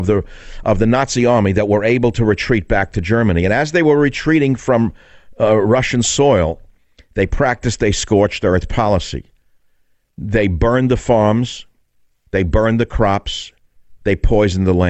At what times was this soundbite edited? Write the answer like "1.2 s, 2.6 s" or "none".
14.0 s